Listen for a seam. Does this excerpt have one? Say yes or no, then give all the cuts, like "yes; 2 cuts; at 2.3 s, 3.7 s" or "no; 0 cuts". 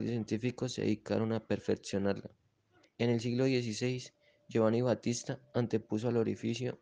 yes; 1 cut; at 2.8 s